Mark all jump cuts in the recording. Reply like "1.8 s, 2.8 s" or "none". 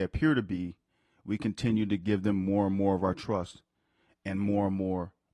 none